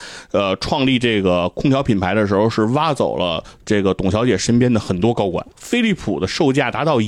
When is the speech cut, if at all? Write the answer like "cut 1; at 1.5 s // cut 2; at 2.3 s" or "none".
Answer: cut 1; at 5.5 s